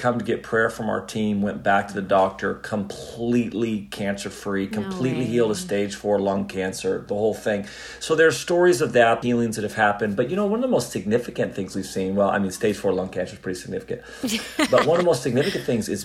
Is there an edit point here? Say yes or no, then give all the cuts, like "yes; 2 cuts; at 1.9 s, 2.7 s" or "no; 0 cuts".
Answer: yes; 1 cut; at 9.2 s